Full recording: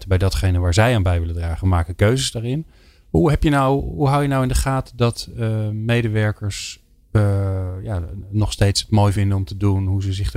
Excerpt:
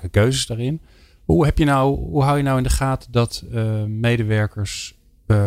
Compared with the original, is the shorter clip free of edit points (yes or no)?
yes